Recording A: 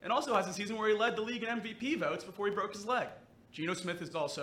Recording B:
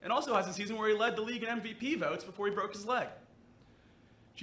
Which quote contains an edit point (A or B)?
A